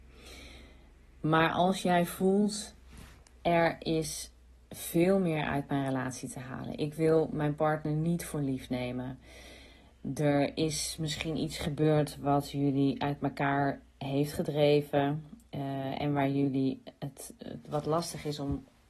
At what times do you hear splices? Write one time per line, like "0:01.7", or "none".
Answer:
none